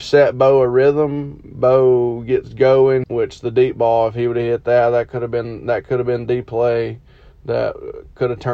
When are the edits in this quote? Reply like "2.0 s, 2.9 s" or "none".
3.0 s